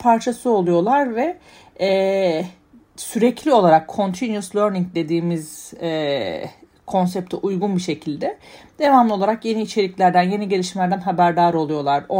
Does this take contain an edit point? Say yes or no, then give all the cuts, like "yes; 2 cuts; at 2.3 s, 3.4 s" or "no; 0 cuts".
no; 0 cuts